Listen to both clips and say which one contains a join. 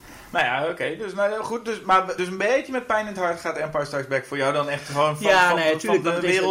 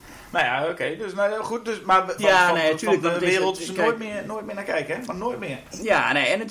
second; 1 cut; at 2.2 s

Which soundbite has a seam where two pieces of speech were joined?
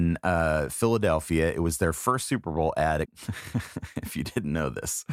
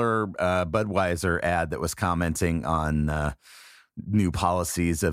first; 1 cut; at 3.0 s

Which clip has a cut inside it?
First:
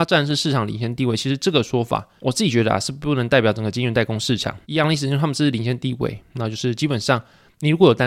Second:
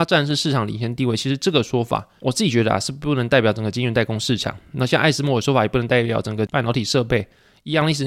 first; 1 cut; at 4.6 s

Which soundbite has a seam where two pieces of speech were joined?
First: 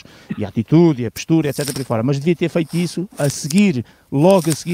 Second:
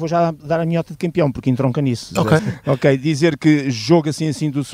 second; 1 cut; at 2.4 s

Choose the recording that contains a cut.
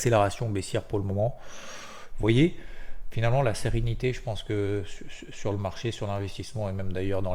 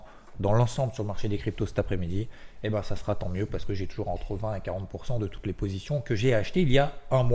first; 1 cut; at 2.1 s

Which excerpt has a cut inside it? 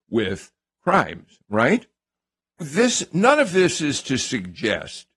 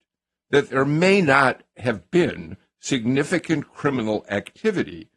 first; 1 cut; at 2.6 s

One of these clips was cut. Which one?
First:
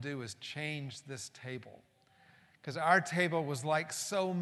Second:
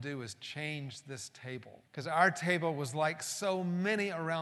second; 1 cut; at 1.8 s

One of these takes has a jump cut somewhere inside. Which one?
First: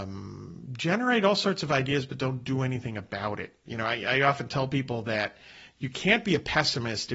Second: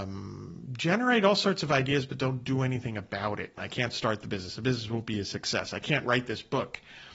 second; 1 cut; at 3.6 s

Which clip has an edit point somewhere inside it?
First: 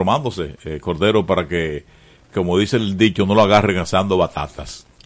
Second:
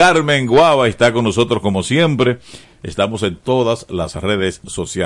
second; 1 cut; at 2.6 s

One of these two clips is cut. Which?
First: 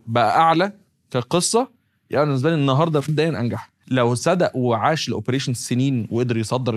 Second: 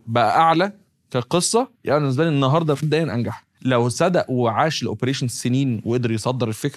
second; 1 cut; at 1.7 s

